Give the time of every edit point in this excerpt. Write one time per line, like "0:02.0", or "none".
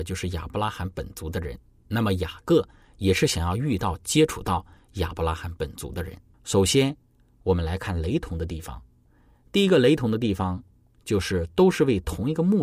0:06.3